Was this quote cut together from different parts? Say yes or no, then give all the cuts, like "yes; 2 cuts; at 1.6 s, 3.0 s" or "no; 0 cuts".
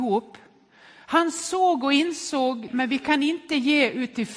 yes; 1 cut; at 2.7 s